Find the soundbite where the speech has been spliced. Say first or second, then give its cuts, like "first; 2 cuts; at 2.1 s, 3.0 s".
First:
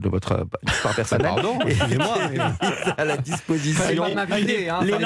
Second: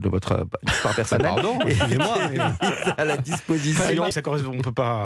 second; 1 cut; at 4.1 s